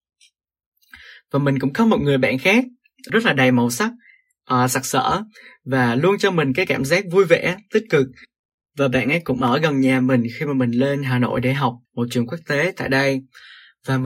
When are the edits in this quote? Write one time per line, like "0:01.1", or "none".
0:03.1
0:11.9